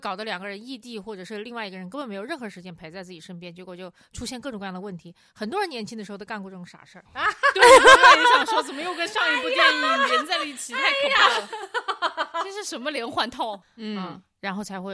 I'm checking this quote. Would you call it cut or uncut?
cut